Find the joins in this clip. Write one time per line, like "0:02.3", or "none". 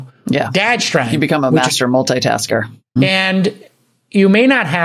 0:03.0